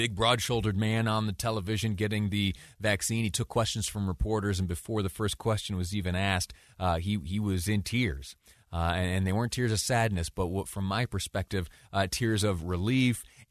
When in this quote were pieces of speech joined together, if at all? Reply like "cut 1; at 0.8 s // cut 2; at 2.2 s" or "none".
none